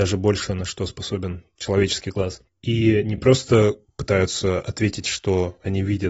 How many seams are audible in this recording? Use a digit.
0